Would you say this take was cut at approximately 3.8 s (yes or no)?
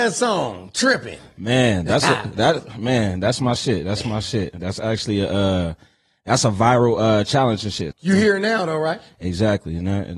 no